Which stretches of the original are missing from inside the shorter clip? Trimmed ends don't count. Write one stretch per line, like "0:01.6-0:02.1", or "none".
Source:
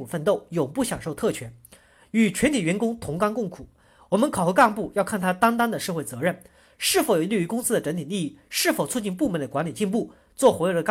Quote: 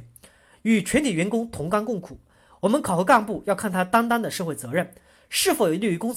none